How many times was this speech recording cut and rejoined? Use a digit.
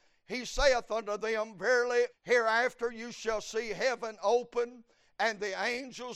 1